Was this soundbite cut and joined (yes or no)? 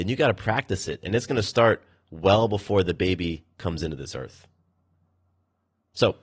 no